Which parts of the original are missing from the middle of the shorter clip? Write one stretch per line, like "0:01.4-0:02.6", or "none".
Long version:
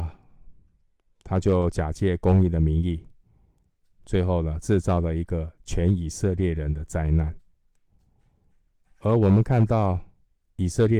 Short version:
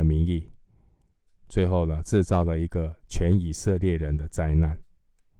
none